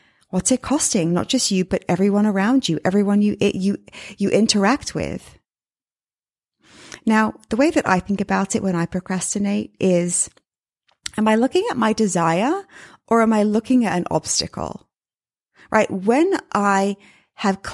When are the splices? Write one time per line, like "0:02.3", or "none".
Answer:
none